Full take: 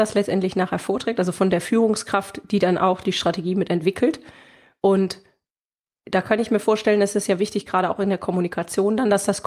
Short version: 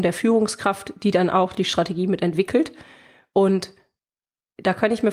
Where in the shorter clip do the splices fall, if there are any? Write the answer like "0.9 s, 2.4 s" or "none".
none